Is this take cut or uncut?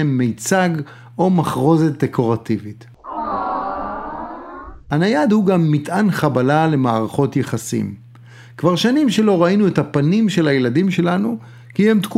uncut